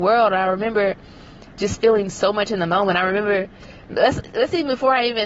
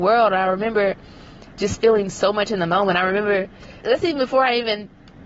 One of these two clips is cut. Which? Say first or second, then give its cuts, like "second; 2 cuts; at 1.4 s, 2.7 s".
second; 1 cut; at 3.8 s